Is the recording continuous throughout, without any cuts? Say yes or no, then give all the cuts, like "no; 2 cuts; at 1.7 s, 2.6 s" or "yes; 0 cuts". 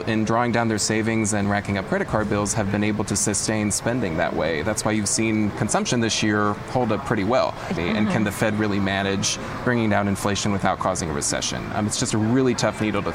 no; 1 cut; at 7.8 s